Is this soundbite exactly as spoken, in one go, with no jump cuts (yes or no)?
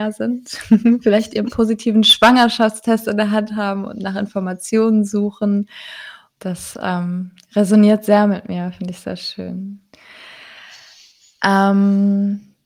no